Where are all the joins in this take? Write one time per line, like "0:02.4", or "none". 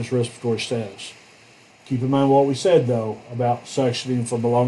0:01.7